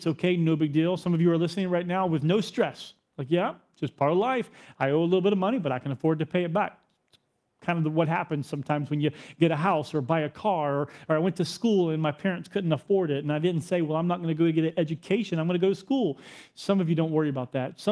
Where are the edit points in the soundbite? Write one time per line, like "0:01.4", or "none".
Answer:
none